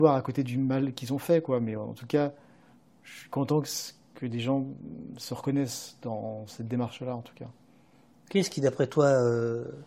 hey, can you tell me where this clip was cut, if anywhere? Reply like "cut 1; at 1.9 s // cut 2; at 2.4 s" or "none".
cut 1; at 1.8 s